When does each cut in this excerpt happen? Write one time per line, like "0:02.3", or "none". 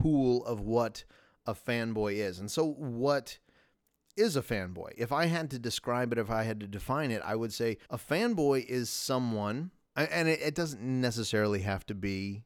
0:07.8
0:09.8